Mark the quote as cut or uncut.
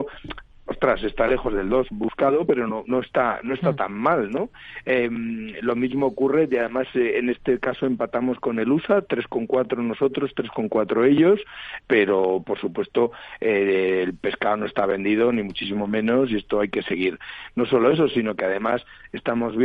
cut